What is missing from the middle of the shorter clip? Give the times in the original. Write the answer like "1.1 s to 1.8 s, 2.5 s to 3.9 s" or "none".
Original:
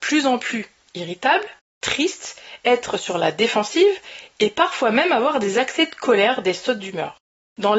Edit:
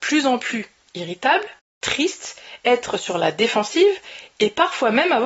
none